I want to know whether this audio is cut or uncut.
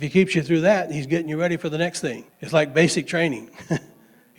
cut